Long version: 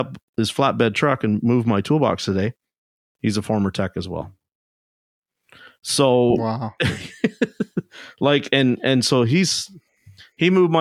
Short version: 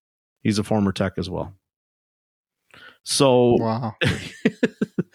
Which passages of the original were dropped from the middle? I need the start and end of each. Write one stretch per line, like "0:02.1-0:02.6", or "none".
none